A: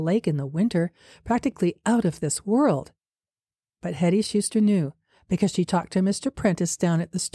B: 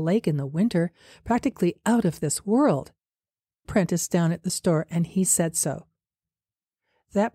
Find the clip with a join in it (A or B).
B